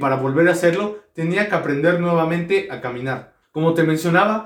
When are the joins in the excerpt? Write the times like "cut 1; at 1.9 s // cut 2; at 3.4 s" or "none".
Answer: cut 1; at 3.4 s

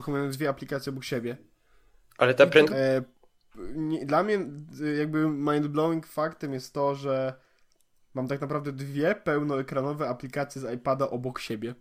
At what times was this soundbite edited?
cut 1; at 2.7 s

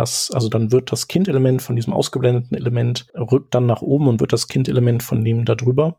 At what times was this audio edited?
cut 1; at 3.1 s

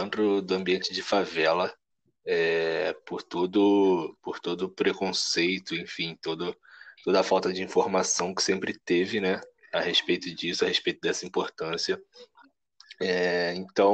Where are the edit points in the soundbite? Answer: none

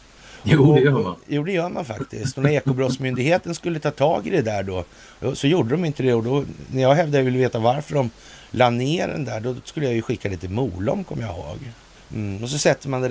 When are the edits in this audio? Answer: cut 1; at 11.9 s

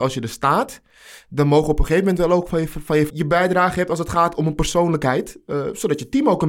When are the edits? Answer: cut 1; at 3.1 s

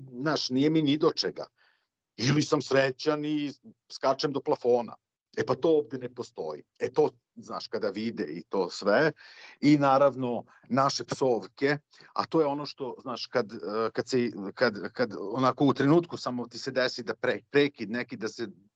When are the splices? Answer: none

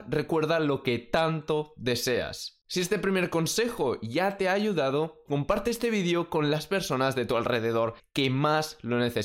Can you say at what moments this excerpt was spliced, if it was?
cut 1; at 2.6 s // cut 2; at 5.3 s

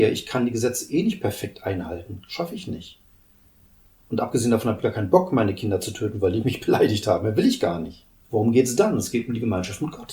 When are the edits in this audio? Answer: cut 1; at 8.1 s

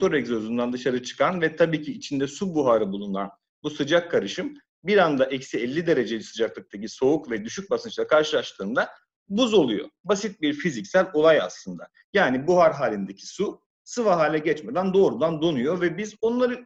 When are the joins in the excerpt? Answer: none

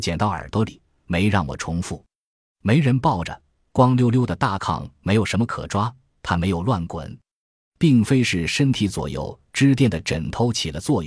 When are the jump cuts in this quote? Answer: none

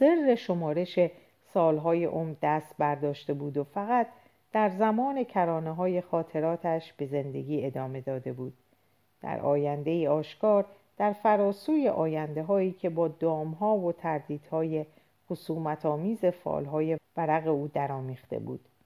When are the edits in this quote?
cut 1; at 17.0 s

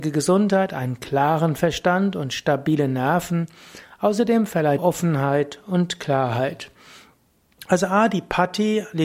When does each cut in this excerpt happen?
cut 1; at 4.8 s

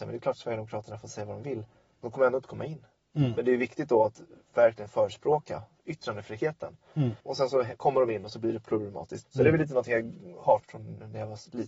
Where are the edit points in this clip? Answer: cut 1; at 7.2 s // cut 2; at 9.2 s // cut 3; at 10.6 s

